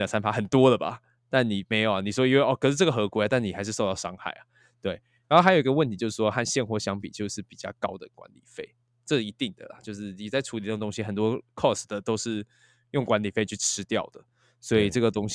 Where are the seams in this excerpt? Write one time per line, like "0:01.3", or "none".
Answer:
none